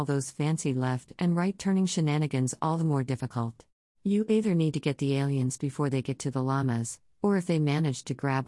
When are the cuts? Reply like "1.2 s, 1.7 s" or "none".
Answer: 3.9 s